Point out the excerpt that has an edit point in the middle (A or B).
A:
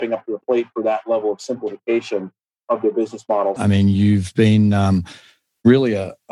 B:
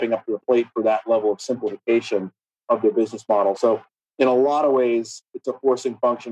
A